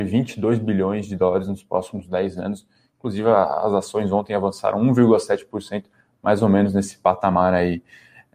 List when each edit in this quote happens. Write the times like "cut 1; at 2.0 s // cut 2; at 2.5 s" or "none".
none